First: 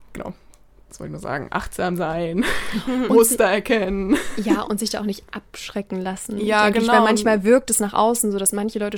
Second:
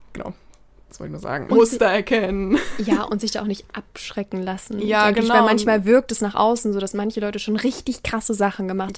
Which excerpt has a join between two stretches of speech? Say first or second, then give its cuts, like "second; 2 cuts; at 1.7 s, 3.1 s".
second; 1 cut; at 1.5 s